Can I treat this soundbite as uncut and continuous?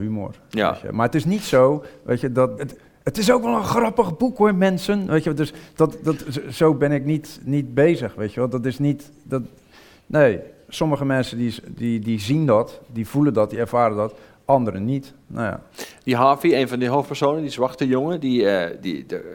no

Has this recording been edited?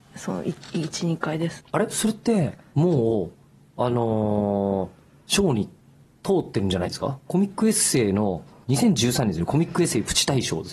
yes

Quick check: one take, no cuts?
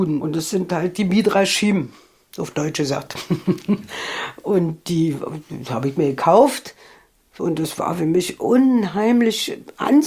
yes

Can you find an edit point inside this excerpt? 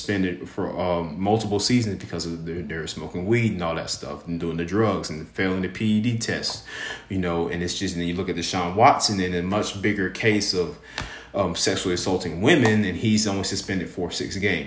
no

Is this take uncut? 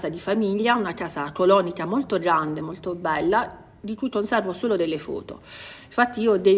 yes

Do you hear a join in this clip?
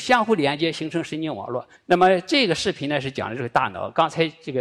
yes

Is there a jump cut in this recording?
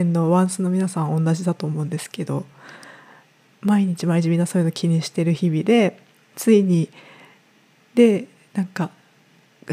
no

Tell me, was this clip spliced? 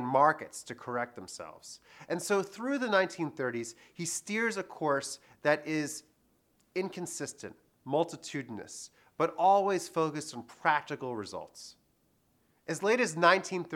no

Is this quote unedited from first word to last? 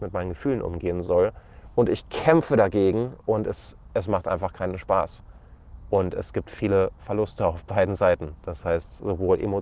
yes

